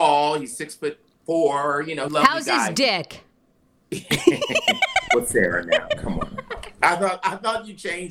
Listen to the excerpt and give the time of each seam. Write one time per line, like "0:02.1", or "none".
0:02.1